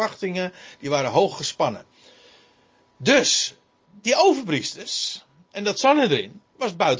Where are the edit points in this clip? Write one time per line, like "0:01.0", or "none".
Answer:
none